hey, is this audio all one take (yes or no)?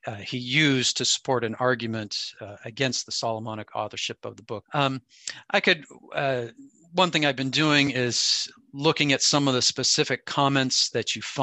no